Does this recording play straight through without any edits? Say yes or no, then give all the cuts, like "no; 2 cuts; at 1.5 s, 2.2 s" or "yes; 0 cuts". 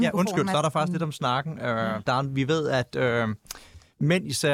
yes; 0 cuts